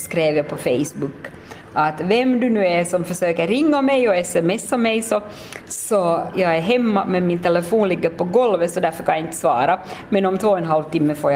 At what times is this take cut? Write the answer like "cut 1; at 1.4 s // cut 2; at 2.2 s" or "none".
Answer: cut 1; at 6.3 s